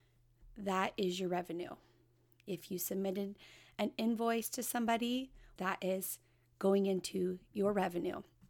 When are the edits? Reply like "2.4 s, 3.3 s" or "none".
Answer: 5.6 s